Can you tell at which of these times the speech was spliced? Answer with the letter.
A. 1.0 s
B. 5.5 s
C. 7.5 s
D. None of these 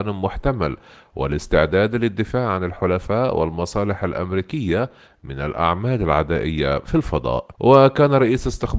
C